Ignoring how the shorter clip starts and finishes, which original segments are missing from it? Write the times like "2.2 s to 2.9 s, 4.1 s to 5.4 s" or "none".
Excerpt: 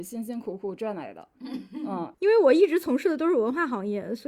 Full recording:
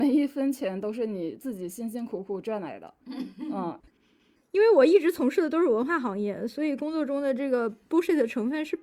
3.8 s to 4.5 s